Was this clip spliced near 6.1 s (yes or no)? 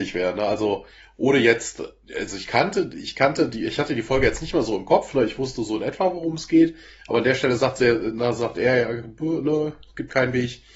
no